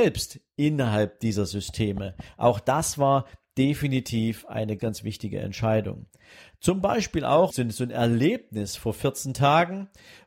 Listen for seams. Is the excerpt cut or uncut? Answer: cut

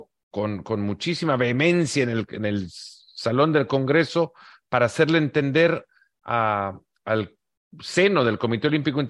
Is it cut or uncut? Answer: uncut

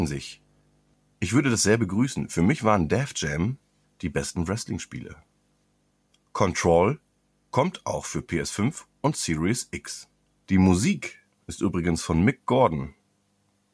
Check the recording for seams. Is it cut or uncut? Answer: cut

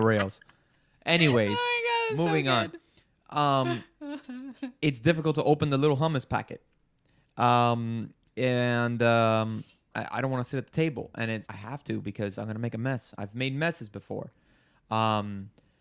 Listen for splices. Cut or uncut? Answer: cut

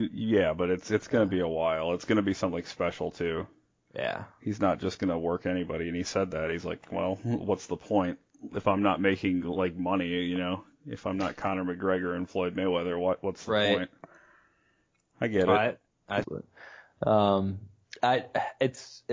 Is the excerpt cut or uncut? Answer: cut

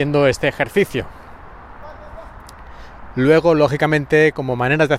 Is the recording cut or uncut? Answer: uncut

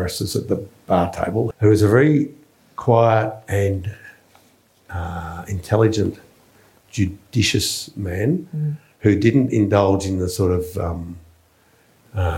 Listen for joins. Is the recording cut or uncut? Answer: cut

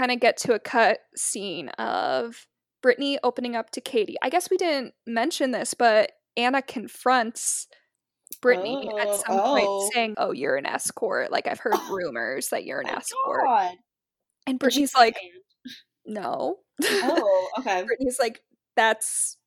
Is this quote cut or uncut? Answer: cut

